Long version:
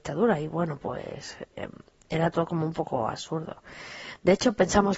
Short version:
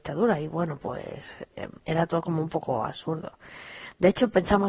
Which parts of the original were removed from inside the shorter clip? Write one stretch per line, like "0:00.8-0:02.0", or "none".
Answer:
0:01.8-0:02.0